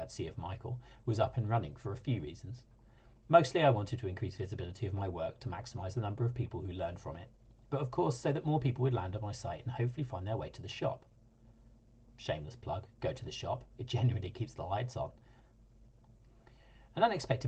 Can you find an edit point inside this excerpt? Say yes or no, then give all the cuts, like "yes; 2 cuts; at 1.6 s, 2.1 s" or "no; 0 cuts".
no; 0 cuts